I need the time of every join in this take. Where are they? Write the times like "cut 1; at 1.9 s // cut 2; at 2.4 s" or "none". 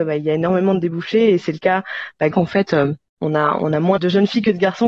cut 1; at 2.3 s // cut 2; at 4.0 s